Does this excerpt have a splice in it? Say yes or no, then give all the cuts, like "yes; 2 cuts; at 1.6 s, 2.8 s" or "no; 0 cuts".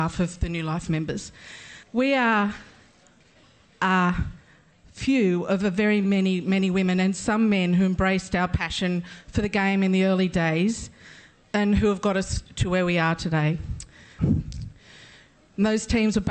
yes; 2 cuts; at 1.8 s, 14.2 s